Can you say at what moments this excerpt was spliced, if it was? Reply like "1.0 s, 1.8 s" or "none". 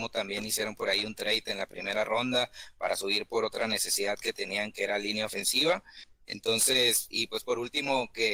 none